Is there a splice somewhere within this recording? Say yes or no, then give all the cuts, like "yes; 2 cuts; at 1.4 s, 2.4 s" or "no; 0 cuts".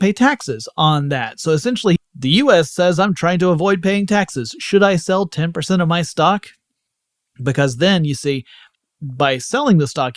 yes; 1 cut; at 2.0 s